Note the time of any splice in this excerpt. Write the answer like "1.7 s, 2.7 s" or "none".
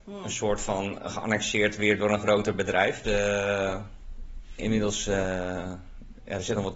3.0 s